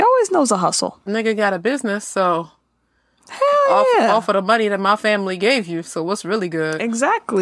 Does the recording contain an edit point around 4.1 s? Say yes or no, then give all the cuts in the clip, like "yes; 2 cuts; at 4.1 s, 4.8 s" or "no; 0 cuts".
no; 1 cut; at 1.1 s